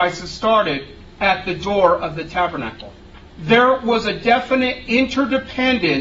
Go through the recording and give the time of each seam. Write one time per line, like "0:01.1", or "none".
0:03.3